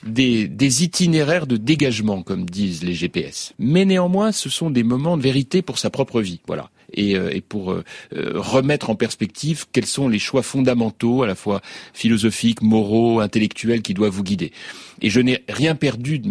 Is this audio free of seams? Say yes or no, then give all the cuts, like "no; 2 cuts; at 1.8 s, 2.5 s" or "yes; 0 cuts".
no; 1 cut; at 3.5 s